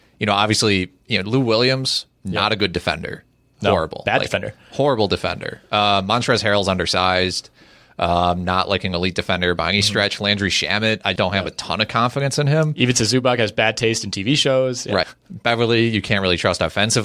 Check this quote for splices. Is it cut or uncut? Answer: cut